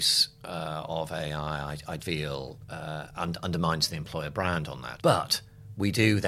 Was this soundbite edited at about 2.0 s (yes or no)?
yes